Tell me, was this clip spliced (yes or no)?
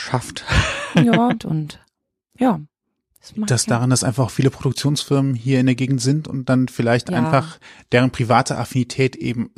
yes